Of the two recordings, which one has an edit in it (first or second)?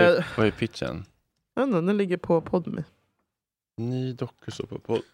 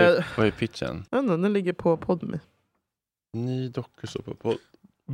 second